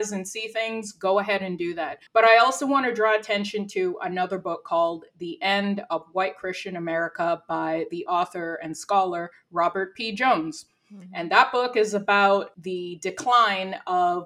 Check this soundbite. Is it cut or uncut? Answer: cut